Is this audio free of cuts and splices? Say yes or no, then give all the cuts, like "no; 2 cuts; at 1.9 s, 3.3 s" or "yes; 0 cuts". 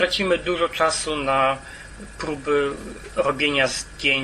yes; 0 cuts